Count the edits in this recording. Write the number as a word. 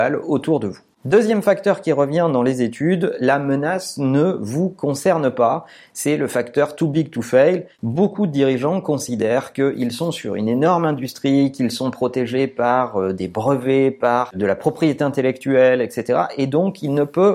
zero